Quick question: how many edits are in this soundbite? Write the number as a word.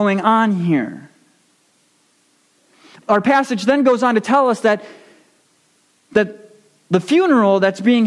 zero